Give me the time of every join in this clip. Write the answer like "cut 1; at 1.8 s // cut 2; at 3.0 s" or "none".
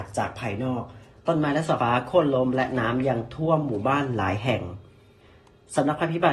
cut 1; at 1.8 s